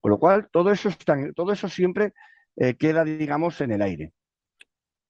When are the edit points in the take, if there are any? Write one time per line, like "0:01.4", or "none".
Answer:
none